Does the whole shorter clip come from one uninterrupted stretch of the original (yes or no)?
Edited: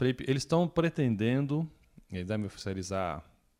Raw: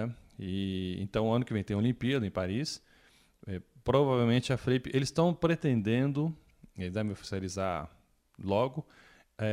yes